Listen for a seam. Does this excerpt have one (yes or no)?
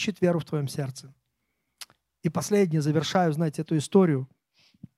no